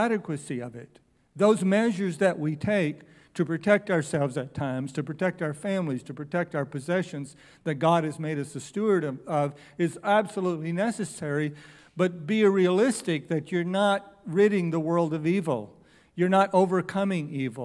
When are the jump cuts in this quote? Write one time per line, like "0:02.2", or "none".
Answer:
none